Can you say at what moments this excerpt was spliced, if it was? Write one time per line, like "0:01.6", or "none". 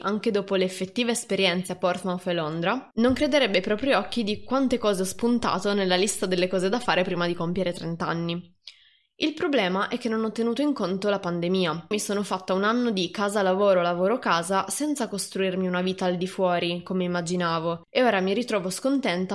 0:11.9
0:17.8